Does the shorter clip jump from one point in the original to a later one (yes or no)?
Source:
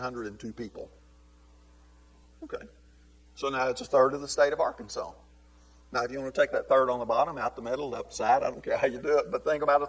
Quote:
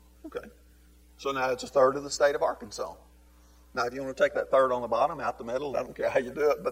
yes